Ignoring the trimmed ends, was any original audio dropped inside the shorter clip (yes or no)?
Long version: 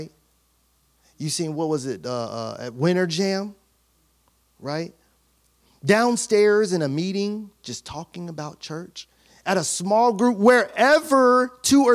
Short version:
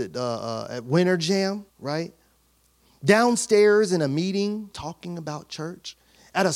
yes